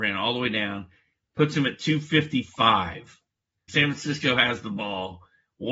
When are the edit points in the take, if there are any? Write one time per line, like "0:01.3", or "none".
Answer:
0:03.7